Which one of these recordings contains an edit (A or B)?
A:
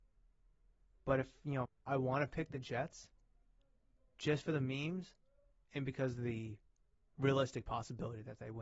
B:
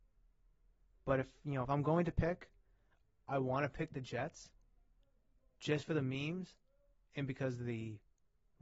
A